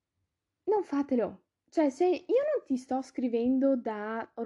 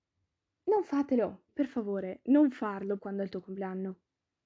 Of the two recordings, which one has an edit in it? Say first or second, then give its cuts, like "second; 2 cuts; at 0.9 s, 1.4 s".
second; 2 cuts; at 1.5 s, 3.0 s